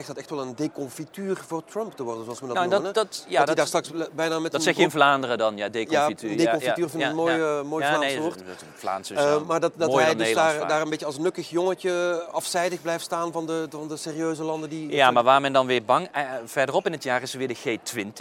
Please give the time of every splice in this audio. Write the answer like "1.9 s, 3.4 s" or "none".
none